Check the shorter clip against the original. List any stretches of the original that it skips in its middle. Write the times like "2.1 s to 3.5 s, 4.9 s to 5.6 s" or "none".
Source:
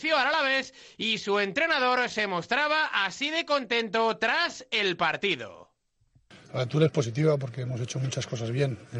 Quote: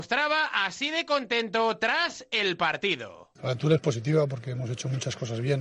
5.7 s to 6.5 s